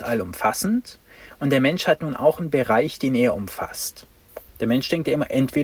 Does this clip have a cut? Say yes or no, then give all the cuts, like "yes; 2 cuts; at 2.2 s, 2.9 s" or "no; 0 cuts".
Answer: yes; 1 cut; at 4.5 s